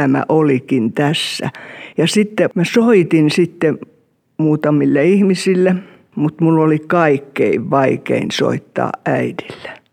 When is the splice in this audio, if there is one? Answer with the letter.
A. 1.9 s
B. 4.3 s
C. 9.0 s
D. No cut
A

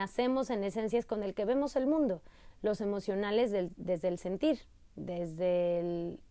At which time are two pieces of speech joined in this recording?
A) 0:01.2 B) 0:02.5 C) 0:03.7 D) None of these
B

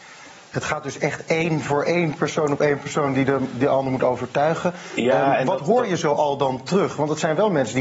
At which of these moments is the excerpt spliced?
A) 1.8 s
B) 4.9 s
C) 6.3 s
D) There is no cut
A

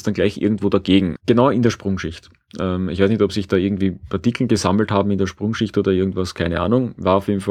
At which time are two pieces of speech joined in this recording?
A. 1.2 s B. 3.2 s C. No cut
A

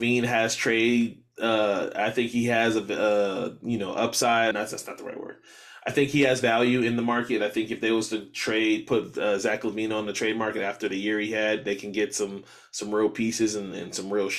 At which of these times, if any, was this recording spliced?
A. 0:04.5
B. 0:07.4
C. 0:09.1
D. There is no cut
A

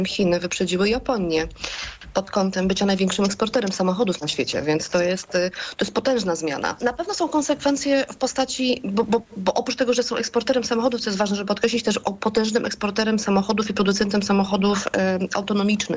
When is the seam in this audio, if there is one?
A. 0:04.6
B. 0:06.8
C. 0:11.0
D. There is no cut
B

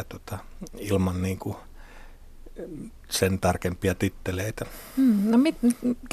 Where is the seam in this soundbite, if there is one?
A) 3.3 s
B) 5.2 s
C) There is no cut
C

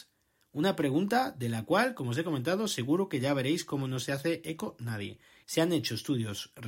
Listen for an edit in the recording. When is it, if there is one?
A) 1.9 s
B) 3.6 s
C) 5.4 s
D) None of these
C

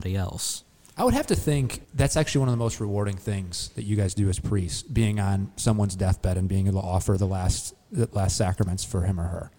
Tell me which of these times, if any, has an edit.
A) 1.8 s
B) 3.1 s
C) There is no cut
A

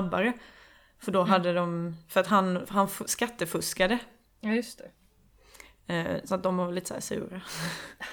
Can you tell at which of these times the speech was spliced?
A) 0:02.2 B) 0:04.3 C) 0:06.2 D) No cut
B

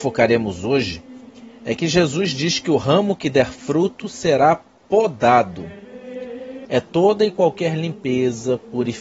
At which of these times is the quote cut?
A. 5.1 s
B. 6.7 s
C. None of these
B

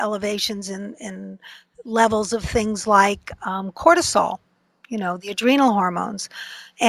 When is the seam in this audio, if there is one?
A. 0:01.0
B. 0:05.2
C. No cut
C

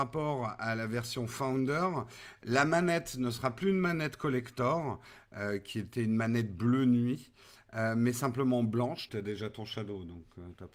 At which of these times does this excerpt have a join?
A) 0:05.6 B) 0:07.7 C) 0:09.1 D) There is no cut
C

